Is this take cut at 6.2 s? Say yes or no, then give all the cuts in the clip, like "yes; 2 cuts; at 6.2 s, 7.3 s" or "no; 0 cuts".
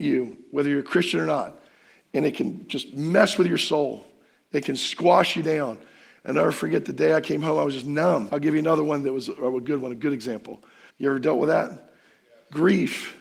no; 2 cuts; at 8.3 s, 10.9 s